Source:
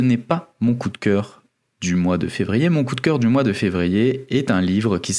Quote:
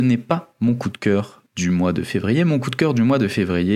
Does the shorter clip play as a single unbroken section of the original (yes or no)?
no